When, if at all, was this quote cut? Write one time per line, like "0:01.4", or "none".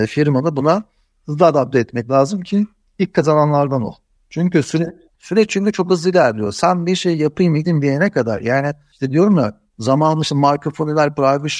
none